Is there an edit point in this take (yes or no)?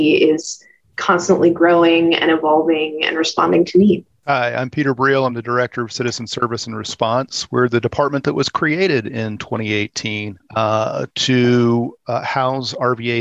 no